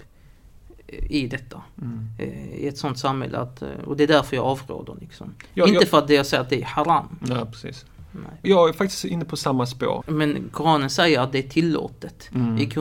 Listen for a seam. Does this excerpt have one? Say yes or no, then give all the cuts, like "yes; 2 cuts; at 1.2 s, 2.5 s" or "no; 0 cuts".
yes; 2 cuts; at 8.4 s, 10.0 s